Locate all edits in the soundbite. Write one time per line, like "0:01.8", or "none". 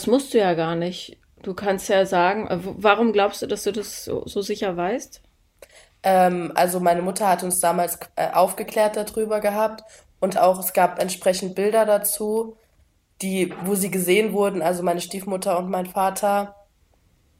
0:10.3

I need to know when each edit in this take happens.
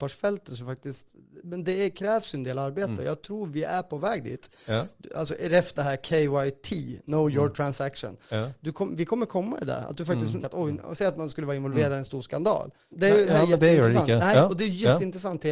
0:10.4
0:12.9

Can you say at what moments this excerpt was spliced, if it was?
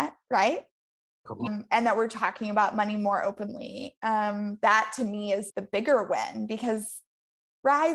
0:01.5
0:05.5

